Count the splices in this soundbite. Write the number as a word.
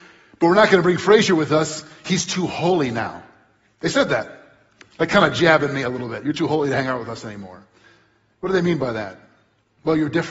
zero